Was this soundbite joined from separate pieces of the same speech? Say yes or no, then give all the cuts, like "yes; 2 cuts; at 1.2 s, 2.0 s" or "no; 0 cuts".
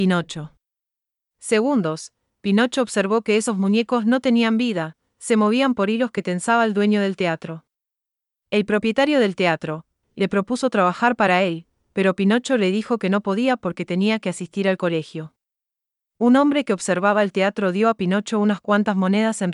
yes; 1 cut; at 10.0 s